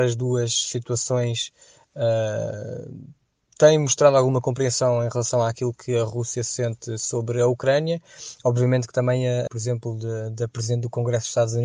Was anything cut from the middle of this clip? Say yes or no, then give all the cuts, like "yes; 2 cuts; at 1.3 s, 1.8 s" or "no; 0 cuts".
yes; 1 cut; at 9.5 s